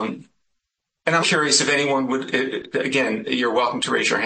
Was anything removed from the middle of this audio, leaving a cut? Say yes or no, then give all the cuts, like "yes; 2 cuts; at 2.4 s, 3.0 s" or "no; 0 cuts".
yes; 1 cut; at 1.2 s